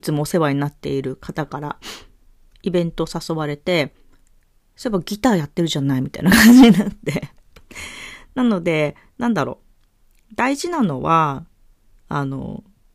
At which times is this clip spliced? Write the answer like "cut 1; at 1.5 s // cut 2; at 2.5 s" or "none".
none